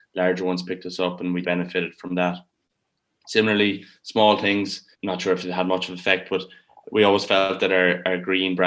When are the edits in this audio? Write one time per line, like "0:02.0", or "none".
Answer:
0:01.4
0:04.9